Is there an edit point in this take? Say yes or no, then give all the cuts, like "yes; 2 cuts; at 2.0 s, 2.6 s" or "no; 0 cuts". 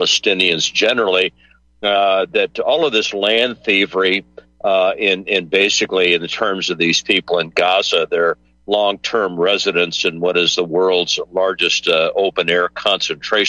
no; 0 cuts